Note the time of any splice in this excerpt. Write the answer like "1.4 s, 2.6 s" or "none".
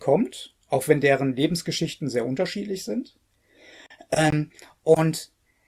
none

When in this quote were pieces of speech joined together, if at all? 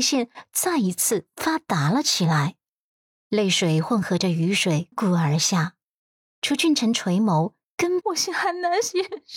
4.9 s, 8.0 s

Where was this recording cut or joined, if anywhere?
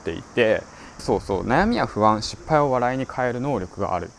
1.0 s

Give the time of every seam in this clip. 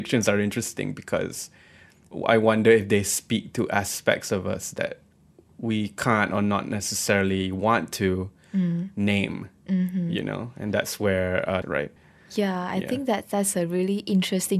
9.6 s, 11.6 s

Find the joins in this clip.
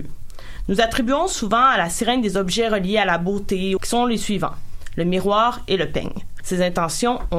3.8 s, 6.4 s

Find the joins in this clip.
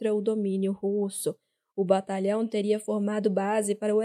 none

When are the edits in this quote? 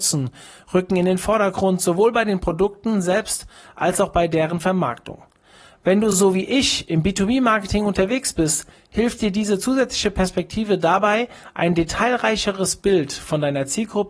none

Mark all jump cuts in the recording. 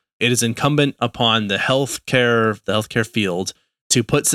2.6 s

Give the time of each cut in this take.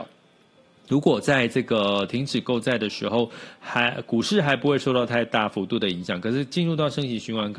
none

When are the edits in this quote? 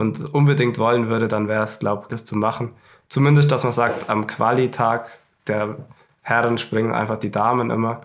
2.1 s

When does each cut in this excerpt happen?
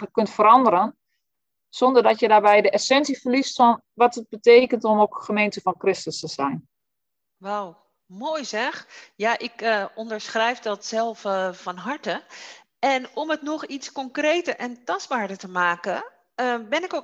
none

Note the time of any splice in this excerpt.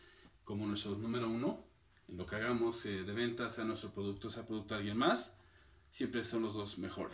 1.9 s

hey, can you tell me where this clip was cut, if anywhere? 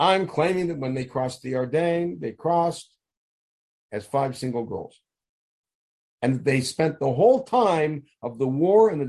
none

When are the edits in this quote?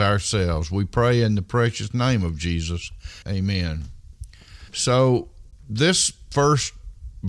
3.2 s, 4.7 s

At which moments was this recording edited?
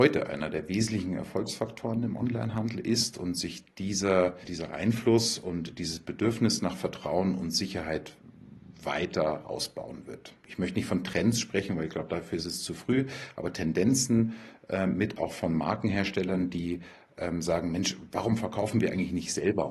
10.4 s

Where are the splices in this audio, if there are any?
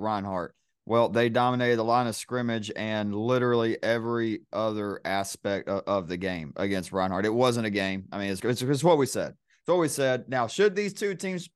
8.4 s

